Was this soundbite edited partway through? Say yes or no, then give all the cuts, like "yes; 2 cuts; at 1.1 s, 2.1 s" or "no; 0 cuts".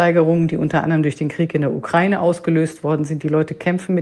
no; 0 cuts